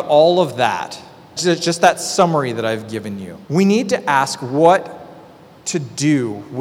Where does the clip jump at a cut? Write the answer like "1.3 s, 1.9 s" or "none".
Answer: 1.4 s, 3.4 s